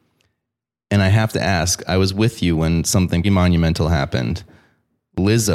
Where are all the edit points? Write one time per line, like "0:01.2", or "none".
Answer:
0:03.2